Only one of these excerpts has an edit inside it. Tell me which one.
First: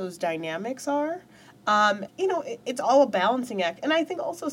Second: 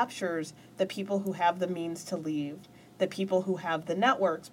first; 1 cut; at 2.1 s

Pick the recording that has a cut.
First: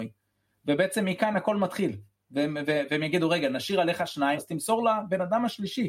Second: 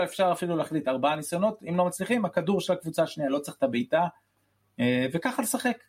first; 1 cut; at 4.4 s

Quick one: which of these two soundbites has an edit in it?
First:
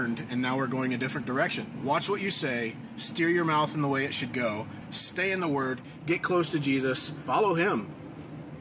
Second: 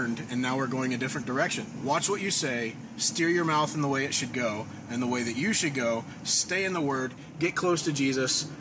first; 1 cut; at 4.8 s

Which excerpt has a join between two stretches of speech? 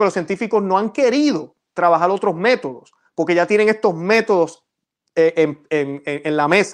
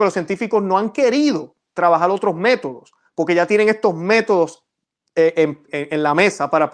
second; 1 cut; at 5.7 s

